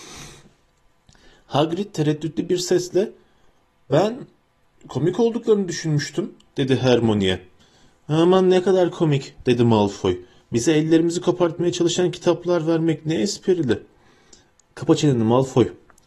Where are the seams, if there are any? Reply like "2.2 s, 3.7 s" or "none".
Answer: none